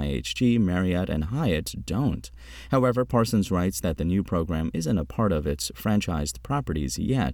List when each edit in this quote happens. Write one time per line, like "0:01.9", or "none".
none